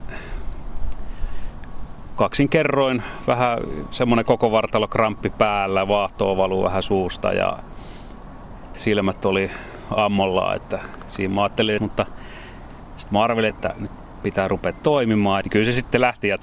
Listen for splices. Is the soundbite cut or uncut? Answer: cut